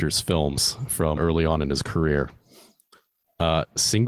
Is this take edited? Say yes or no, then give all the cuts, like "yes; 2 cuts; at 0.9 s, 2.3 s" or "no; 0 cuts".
yes; 1 cut; at 1.2 s